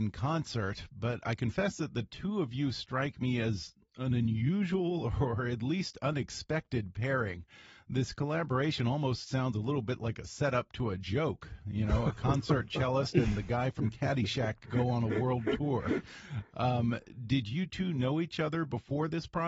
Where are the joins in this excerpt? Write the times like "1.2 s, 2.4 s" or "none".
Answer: none